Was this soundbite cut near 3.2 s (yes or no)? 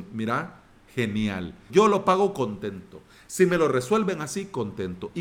no